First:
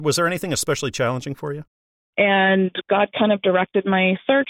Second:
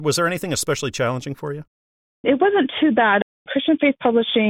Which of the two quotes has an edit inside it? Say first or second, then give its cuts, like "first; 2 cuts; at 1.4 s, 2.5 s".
first; 1 cut; at 2.1 s